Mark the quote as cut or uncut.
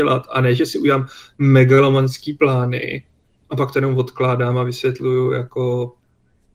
uncut